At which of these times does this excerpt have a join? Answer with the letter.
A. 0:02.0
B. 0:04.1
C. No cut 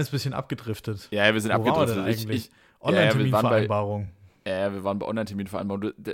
C